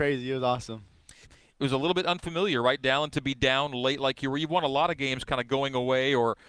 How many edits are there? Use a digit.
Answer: 1